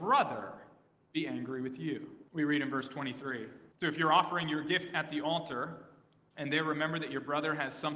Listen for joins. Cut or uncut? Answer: cut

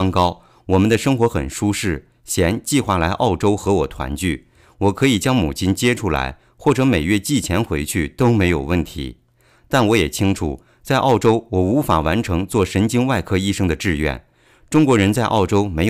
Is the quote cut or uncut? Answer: uncut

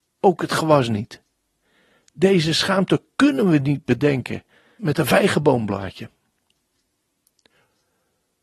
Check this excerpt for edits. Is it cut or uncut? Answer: cut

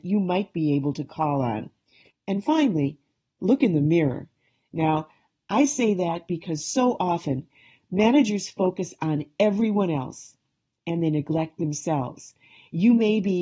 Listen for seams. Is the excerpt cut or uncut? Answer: uncut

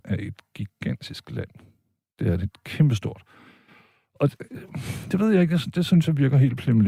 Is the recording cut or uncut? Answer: uncut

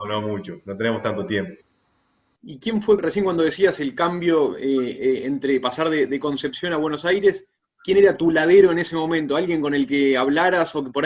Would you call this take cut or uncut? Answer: uncut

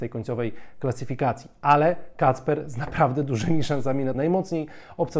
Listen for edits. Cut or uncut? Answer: cut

